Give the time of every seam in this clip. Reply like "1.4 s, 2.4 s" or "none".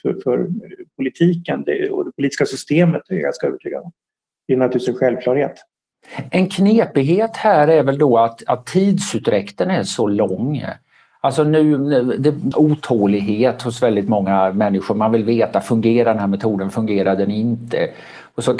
12.5 s